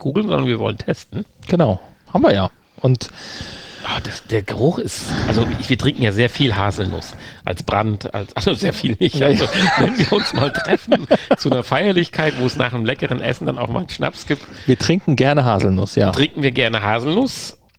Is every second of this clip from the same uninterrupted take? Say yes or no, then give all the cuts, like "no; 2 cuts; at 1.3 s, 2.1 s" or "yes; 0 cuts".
yes; 0 cuts